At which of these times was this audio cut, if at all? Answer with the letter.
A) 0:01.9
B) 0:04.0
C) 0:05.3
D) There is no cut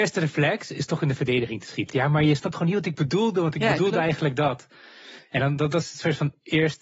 A